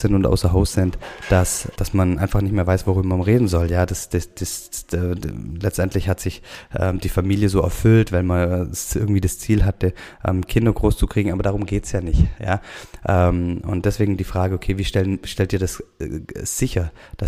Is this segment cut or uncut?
cut